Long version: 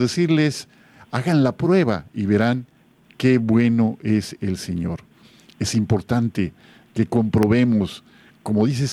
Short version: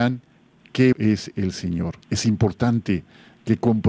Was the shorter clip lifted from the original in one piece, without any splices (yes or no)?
no